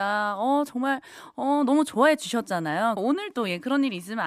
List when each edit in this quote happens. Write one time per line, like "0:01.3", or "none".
0:03.0